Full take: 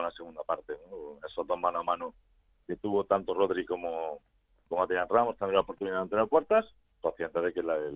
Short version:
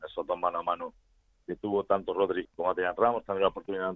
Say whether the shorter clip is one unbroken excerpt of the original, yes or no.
no